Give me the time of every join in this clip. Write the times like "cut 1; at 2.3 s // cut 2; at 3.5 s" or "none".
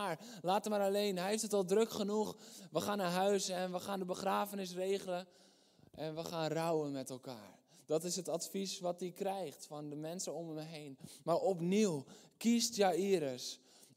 none